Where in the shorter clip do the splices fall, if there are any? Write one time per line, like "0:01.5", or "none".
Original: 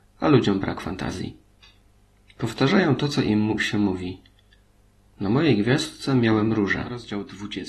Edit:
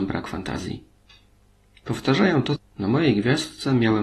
0:02.6